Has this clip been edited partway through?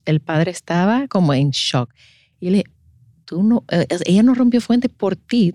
no; 0 cuts

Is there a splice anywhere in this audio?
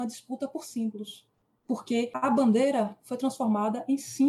yes; 1 cut; at 1.6 s

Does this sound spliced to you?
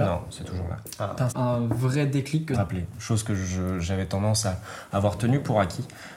yes; 2 cuts; at 1.3 s, 2.5 s

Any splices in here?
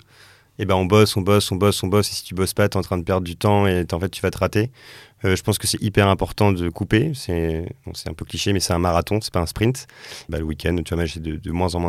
yes; 1 cut; at 10.3 s

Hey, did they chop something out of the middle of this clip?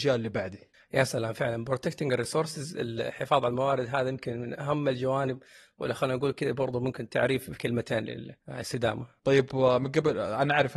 yes; 1 cut; at 8.4 s

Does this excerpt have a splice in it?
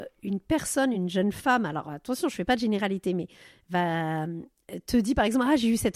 no; 0 cuts

